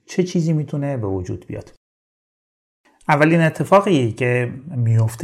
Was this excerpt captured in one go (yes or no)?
yes